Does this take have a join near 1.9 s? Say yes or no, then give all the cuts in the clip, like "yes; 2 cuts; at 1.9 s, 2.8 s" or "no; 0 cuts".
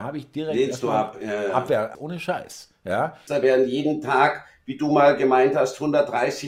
yes; 2 cuts; at 1.9 s, 3.3 s